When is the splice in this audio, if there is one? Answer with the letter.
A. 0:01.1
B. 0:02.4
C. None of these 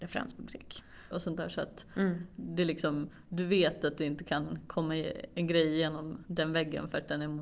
A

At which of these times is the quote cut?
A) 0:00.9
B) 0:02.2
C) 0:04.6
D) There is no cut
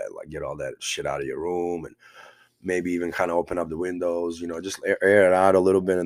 D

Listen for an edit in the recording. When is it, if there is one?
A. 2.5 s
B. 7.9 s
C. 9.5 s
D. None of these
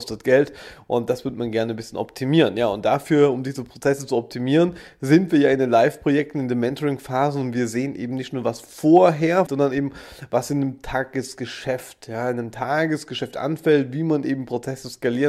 C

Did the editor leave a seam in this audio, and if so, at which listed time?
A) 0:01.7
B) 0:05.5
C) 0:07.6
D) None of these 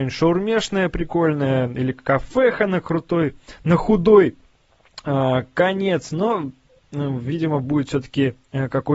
D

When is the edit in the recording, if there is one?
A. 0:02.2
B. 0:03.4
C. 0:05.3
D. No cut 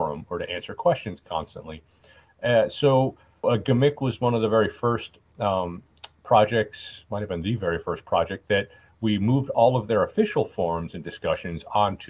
B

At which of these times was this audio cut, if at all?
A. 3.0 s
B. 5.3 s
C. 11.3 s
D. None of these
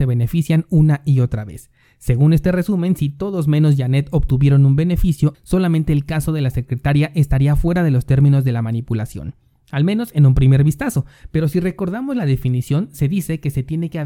B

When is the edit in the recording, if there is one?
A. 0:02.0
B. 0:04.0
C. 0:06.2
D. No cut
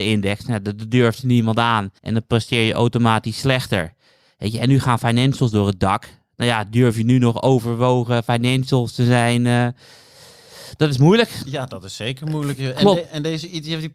A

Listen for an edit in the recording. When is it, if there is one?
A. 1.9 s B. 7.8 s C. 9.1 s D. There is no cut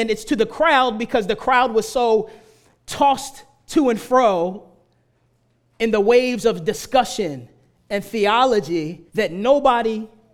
C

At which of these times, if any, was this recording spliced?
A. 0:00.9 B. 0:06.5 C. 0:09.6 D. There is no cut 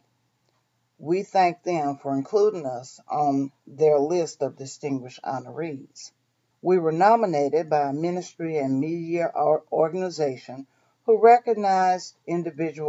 B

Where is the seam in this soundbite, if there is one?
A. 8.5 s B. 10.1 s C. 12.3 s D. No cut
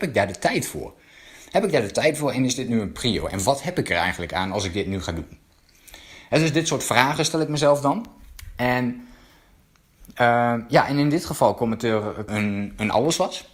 C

